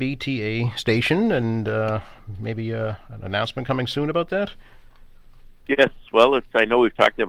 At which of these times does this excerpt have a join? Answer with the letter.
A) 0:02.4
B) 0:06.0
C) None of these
C